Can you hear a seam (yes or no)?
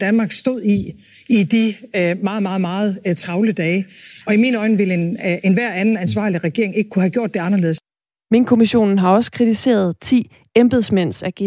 no